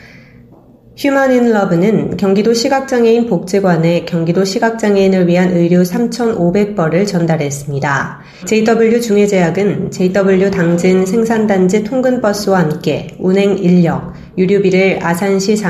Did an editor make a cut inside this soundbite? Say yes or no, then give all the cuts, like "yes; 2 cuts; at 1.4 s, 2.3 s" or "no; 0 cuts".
yes; 1 cut; at 8.4 s